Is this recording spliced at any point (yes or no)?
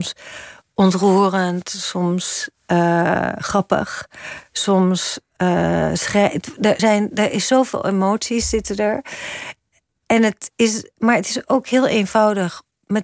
yes